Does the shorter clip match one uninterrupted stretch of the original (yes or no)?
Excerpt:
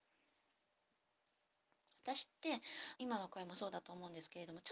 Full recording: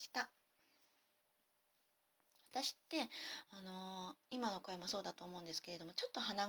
no